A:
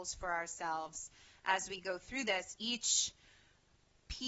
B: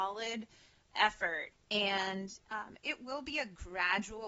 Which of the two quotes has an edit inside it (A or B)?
B